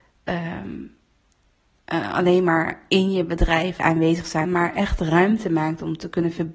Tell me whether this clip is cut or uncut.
cut